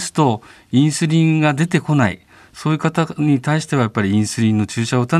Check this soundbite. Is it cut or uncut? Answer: uncut